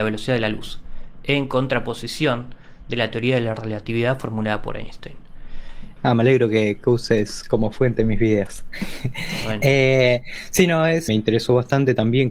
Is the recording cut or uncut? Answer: cut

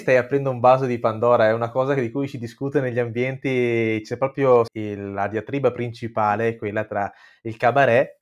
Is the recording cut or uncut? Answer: cut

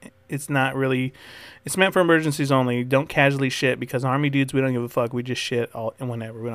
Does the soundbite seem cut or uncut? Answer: uncut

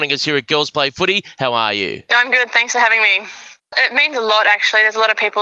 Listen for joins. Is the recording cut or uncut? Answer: cut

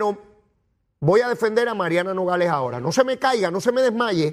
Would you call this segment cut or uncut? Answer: uncut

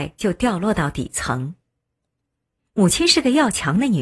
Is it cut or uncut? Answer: uncut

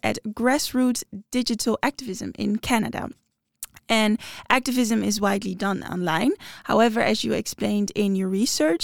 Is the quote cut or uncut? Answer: uncut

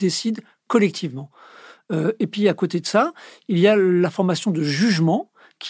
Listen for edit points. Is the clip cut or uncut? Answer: uncut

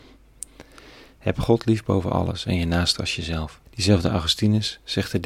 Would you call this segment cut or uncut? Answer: cut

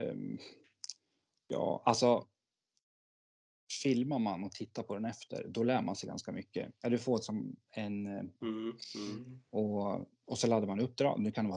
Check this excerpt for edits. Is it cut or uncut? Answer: cut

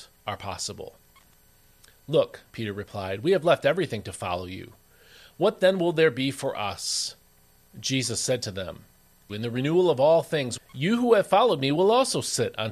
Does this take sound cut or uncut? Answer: cut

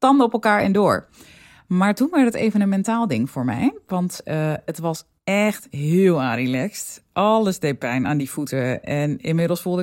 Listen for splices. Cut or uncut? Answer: uncut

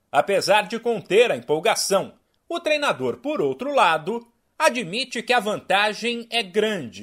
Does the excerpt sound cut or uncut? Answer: uncut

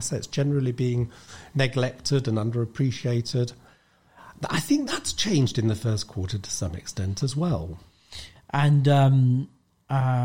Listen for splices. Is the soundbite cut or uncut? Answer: cut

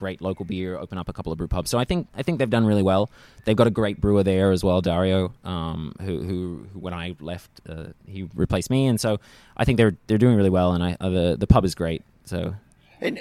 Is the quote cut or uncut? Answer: uncut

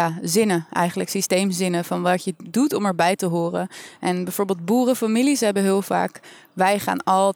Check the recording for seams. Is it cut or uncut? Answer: uncut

